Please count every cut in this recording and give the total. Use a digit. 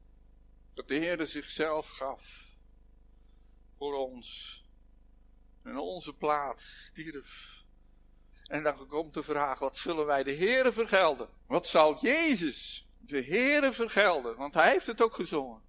3